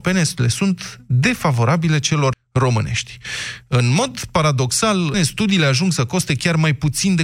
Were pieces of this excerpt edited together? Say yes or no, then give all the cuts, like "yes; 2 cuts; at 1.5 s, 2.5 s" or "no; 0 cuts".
yes; 2 cuts; at 2.3 s, 5.1 s